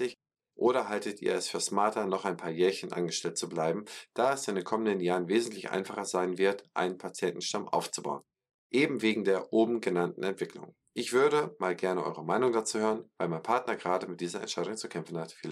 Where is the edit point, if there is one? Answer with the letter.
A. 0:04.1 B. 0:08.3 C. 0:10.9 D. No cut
D